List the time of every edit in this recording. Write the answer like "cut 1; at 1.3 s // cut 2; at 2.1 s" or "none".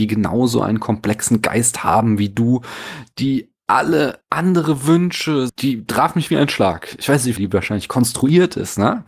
cut 1; at 5.5 s // cut 2; at 7.4 s